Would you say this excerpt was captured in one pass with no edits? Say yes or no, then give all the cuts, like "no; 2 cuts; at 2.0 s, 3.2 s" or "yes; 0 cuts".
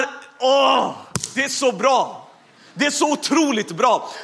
yes; 0 cuts